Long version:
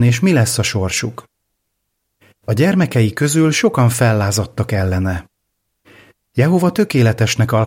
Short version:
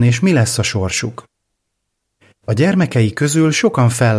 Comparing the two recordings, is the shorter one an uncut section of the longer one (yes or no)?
yes